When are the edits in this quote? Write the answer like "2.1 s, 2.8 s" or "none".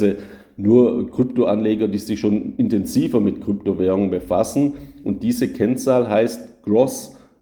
none